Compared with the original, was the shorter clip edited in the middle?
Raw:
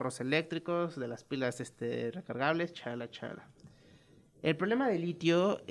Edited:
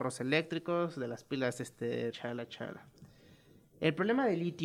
yes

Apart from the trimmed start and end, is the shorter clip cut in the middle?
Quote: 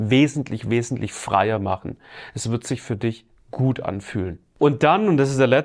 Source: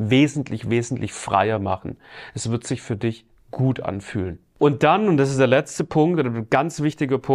no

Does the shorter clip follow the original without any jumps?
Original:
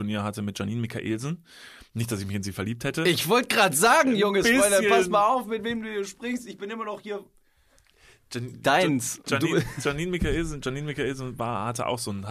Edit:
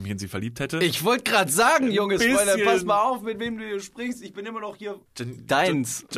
no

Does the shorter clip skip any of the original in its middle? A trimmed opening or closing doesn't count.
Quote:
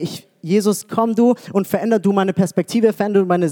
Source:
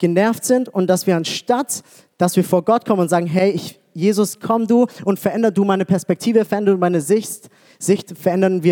no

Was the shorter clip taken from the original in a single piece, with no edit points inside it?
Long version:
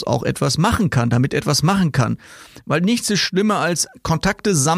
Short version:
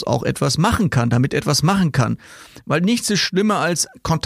yes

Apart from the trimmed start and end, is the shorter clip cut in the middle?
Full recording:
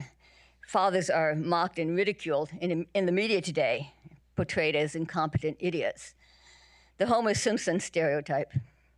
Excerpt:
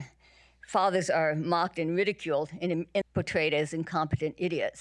yes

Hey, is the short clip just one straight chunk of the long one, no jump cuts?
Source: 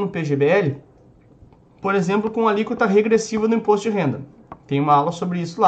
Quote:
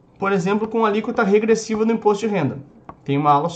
yes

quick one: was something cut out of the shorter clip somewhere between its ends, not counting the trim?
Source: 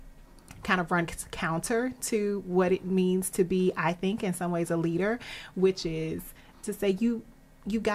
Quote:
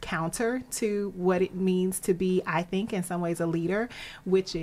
no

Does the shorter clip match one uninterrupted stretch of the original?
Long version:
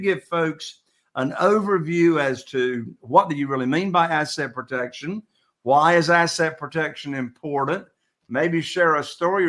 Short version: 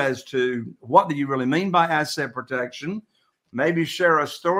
no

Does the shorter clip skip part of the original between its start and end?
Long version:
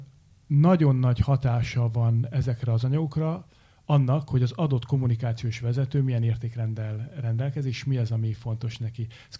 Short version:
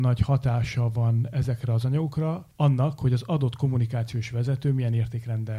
yes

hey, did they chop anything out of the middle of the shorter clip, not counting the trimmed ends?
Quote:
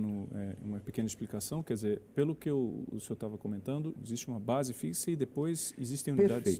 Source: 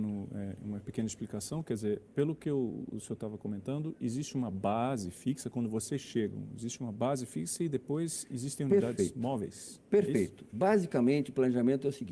yes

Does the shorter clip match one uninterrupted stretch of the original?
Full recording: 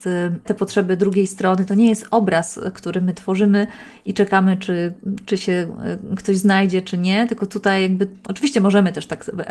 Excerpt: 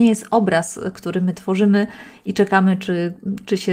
yes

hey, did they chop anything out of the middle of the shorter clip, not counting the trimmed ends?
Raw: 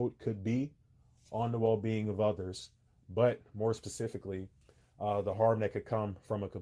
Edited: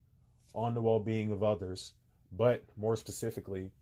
no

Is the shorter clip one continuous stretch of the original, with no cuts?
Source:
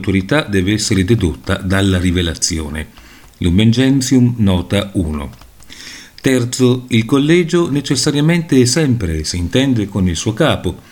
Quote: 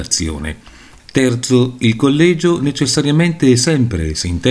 no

